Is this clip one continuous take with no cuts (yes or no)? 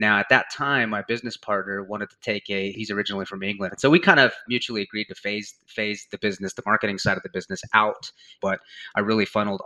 no